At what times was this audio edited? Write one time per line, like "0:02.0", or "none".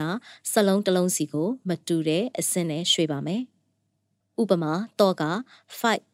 none